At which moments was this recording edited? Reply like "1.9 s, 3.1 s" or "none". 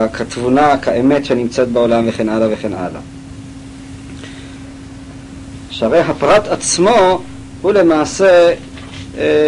5.7 s